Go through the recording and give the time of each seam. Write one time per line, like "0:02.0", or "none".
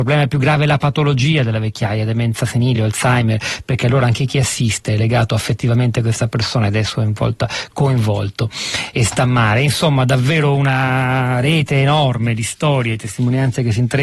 none